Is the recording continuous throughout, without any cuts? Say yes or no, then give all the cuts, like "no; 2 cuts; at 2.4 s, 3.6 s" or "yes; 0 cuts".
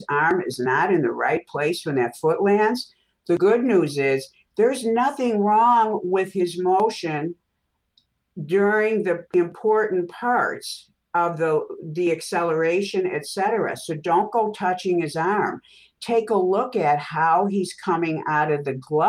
yes; 0 cuts